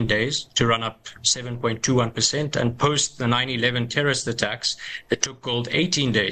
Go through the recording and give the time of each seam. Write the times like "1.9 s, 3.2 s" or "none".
none